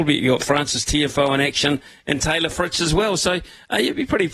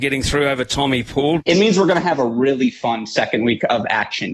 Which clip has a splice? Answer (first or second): second